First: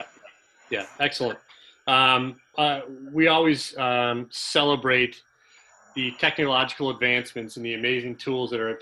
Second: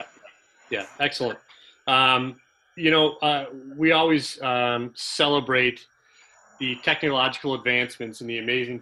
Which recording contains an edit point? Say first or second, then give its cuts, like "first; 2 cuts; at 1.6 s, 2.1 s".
first; 1 cut; at 2.5 s